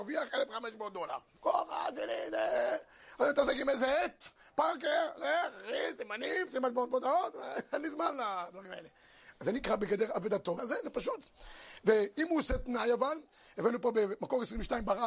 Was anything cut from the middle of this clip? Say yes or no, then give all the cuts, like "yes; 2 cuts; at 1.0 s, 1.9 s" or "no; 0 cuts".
yes; 1 cut; at 10.6 s